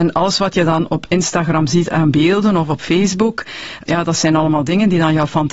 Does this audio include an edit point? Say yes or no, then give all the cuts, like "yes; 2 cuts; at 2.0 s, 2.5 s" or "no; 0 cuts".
yes; 1 cut; at 3.9 s